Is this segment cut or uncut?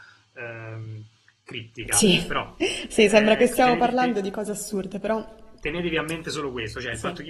uncut